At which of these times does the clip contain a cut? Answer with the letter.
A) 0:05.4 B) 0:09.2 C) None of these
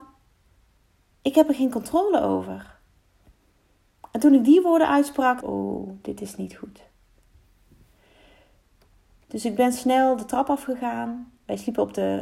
A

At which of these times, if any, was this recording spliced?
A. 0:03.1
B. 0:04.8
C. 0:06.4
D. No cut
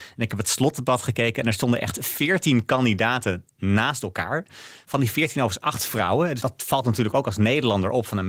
C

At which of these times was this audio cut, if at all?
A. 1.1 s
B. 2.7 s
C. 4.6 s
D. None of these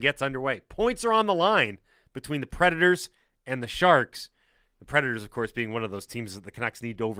D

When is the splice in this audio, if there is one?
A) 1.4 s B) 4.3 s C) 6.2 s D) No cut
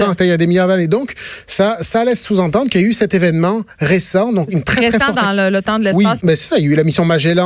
C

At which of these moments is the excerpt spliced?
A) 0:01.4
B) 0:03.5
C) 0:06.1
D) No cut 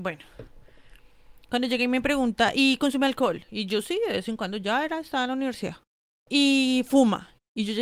D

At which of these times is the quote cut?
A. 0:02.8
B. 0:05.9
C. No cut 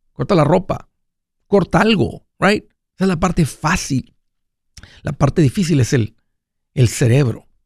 A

